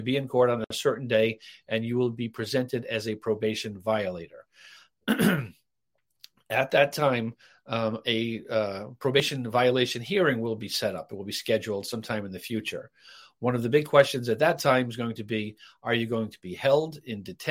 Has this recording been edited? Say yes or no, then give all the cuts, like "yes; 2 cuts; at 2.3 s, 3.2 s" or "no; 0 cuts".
no; 0 cuts